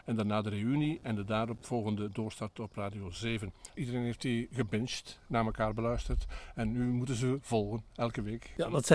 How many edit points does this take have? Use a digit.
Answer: 1